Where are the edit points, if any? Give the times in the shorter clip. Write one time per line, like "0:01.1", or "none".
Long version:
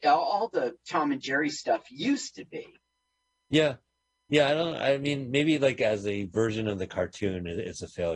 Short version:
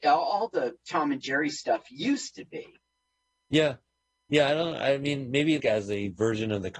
0:05.6